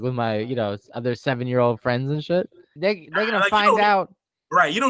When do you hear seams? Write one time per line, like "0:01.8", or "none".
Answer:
0:02.8